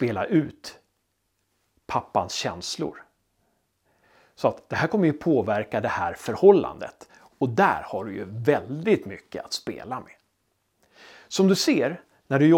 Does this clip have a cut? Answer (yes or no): no